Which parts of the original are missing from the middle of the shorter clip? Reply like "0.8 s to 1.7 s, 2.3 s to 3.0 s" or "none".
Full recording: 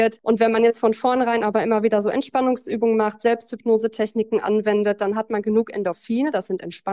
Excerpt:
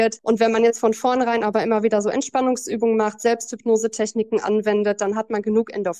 none